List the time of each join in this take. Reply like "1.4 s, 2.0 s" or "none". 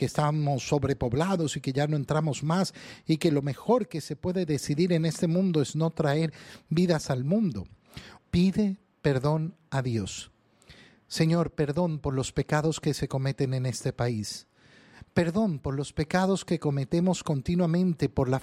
8.2 s